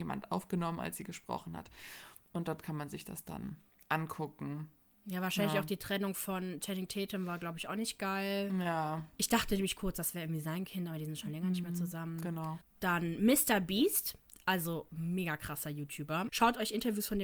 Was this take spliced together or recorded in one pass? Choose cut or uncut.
cut